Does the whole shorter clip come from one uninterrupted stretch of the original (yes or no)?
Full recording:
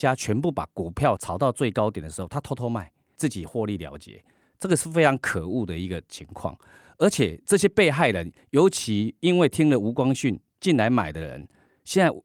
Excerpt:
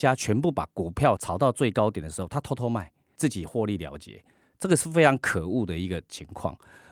yes